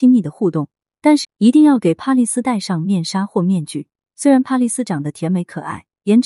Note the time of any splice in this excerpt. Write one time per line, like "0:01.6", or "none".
0:01.2

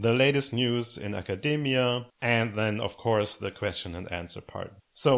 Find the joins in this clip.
0:02.1

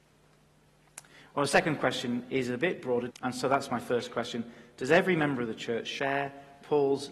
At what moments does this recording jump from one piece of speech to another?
0:03.1

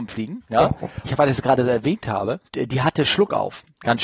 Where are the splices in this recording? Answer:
0:01.1
0:02.5

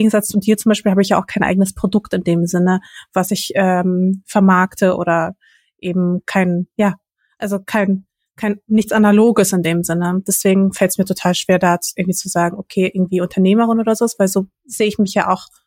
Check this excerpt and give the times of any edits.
none

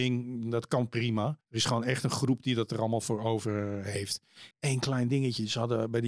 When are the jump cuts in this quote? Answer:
0:01.4
0:04.5

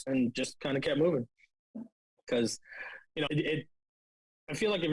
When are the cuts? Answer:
0:03.3

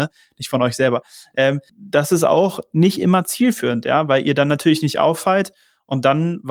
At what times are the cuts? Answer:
0:01.7

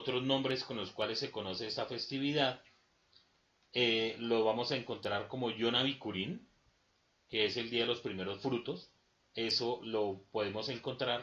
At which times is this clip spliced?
none

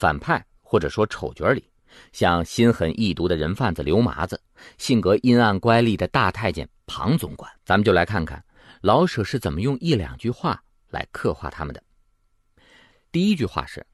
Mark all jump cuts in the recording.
0:07.6
0:13.0

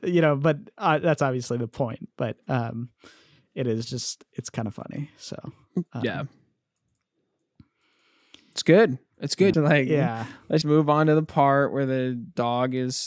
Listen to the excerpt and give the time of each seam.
0:09.5
0:10.6

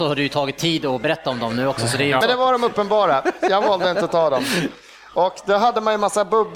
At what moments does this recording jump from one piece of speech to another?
0:02.2

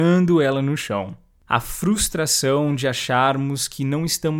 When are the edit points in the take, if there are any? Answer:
0:01.5

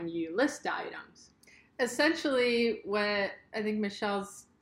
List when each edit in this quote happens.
none

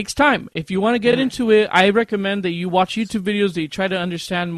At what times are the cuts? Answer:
none

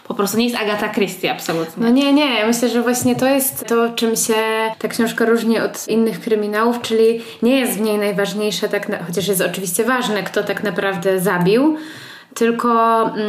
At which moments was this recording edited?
none

